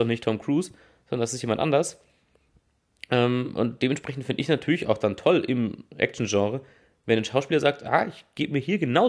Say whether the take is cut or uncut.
uncut